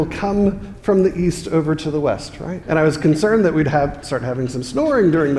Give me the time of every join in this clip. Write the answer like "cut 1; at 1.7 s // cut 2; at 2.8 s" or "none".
cut 1; at 2.6 s

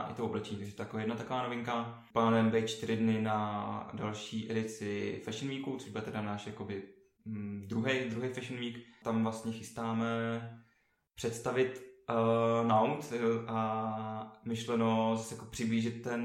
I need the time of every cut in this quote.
none

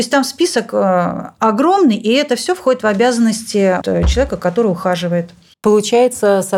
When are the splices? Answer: cut 1; at 3.8 s

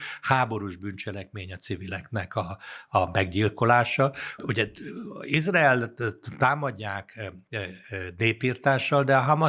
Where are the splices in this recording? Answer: cut 1; at 4.4 s

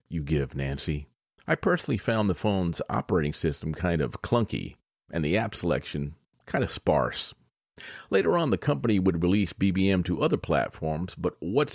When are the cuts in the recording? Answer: cut 1; at 1.4 s

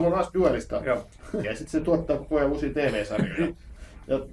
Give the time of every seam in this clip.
cut 1; at 1.4 s

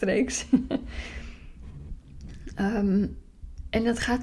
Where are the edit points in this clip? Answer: none

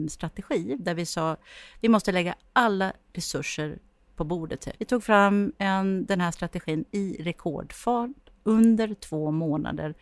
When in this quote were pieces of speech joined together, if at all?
cut 1; at 4.8 s

